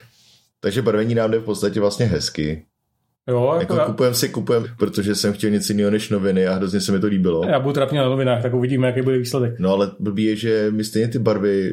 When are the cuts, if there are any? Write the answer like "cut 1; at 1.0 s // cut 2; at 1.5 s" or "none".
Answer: cut 1; at 4.6 s